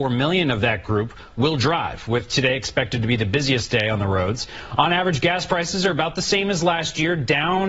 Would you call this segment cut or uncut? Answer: uncut